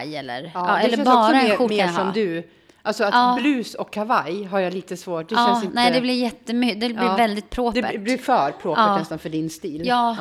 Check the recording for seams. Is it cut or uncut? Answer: cut